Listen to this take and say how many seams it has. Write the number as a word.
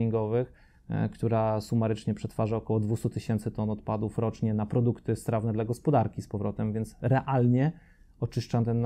zero